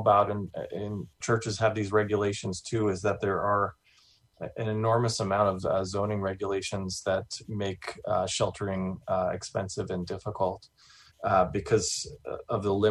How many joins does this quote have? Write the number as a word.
two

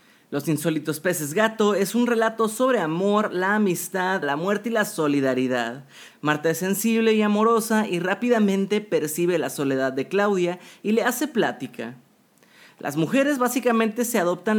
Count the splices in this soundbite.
two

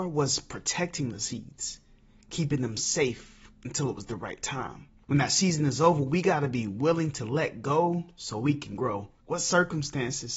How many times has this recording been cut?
two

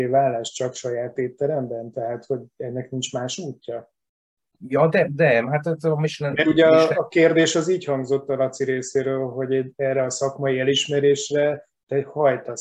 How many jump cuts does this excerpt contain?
zero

